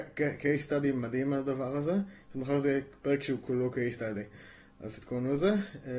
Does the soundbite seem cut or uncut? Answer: uncut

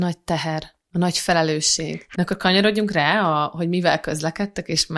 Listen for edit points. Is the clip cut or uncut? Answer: cut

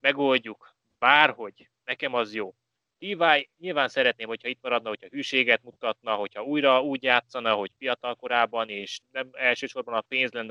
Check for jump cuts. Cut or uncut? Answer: cut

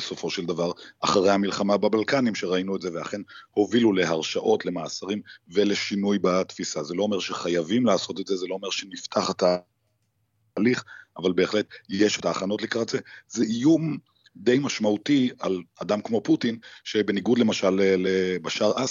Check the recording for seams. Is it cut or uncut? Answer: uncut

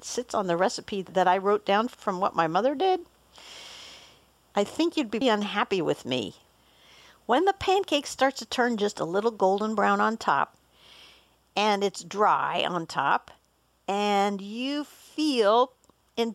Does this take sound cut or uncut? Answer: cut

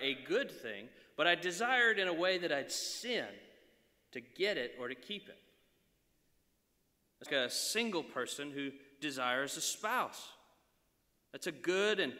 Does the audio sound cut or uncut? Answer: cut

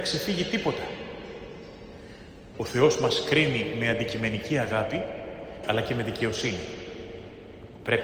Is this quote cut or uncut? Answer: cut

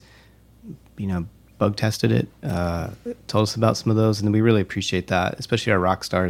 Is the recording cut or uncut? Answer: uncut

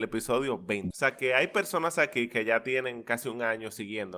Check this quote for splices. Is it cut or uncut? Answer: cut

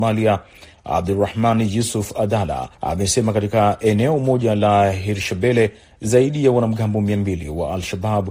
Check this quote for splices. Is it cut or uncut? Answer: cut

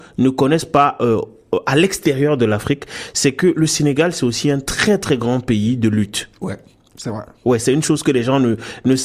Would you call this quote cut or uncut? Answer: uncut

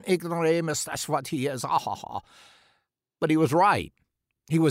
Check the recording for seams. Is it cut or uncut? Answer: cut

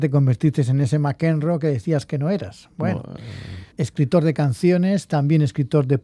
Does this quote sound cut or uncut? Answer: cut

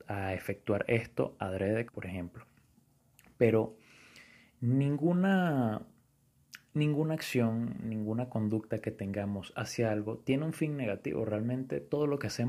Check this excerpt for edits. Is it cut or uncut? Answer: cut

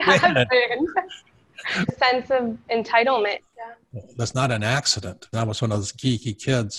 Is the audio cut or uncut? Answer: cut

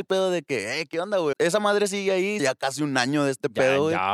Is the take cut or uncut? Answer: cut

